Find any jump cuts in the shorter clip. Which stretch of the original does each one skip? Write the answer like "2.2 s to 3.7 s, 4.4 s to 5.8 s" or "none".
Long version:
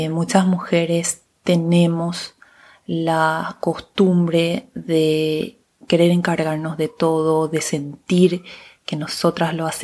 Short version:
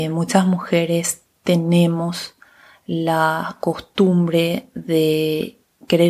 none